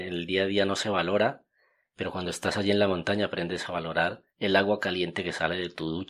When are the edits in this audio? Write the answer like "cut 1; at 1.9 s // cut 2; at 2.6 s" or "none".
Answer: cut 1; at 4.3 s